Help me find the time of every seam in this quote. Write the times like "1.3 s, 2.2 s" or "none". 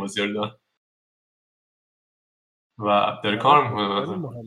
none

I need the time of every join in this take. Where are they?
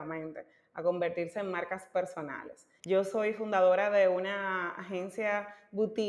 2.8 s

